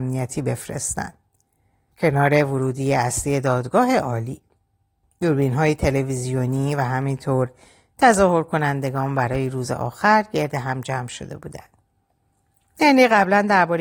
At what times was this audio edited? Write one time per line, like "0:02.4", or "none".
0:01.9